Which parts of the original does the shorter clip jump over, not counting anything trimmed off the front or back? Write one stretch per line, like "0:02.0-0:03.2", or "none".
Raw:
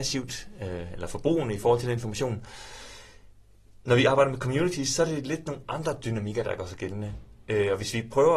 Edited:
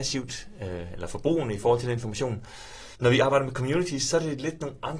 0:02.9-0:03.8